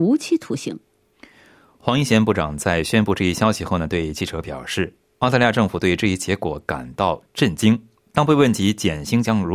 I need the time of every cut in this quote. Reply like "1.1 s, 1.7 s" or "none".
none